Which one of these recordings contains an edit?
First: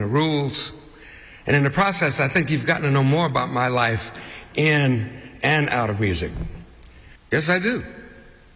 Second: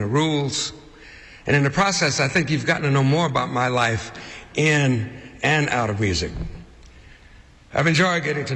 first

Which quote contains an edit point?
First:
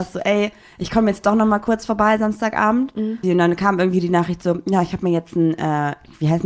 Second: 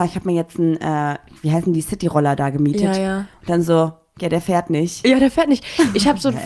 first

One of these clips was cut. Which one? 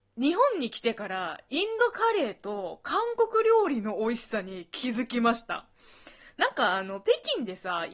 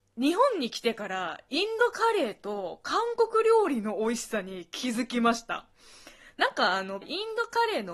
second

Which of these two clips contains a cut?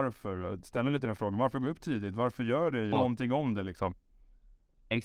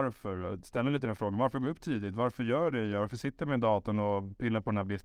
first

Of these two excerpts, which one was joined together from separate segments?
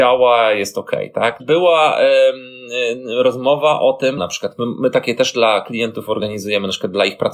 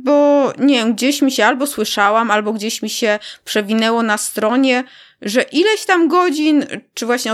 first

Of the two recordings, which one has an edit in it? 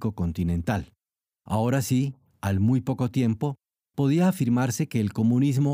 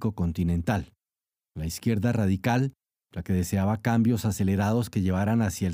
first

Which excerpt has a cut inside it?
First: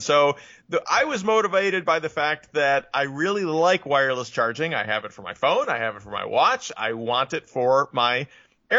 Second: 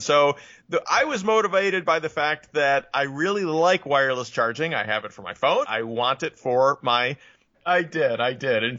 second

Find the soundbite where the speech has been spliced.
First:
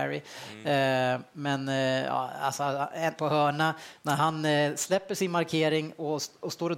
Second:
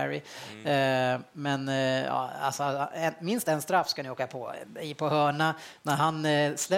first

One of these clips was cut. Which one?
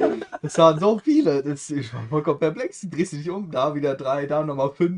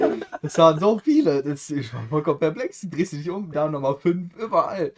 second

